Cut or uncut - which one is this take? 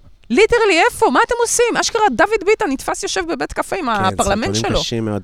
uncut